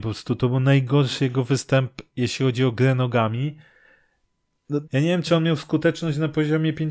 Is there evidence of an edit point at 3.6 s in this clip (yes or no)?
no